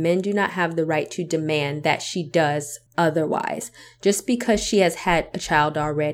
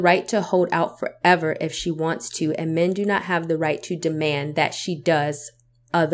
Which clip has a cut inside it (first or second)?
first